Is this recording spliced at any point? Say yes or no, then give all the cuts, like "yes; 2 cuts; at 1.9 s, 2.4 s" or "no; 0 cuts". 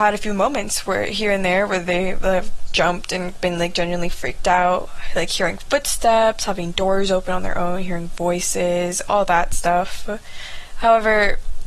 yes; 1 cut; at 2.7 s